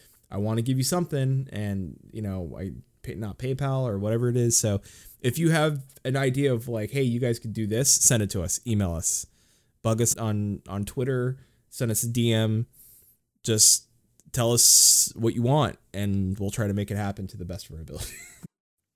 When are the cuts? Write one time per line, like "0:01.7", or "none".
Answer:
0:10.1